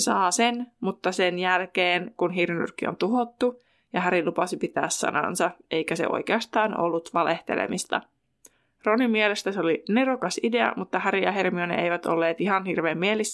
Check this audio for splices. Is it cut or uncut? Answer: uncut